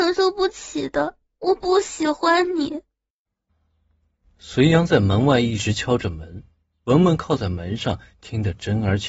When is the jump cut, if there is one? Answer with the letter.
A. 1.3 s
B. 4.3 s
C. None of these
A